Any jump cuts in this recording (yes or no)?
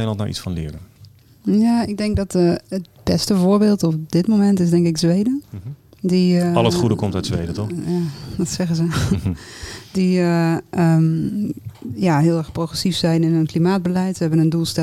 no